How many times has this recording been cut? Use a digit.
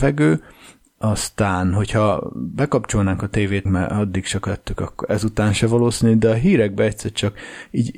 1